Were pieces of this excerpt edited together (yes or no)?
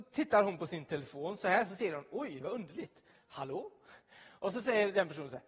yes